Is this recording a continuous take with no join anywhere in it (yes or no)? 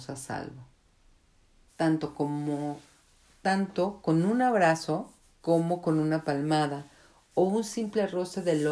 no